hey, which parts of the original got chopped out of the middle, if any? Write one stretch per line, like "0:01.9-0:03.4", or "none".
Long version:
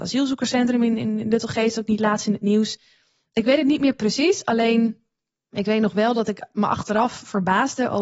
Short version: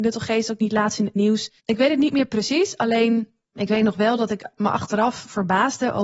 0:02.9-0:03.3
0:05.1-0:05.4